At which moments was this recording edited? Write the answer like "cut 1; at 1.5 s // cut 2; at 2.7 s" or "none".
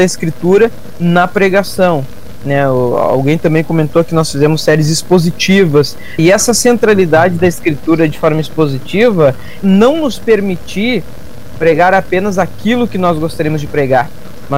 cut 1; at 6.2 s // cut 2; at 9.6 s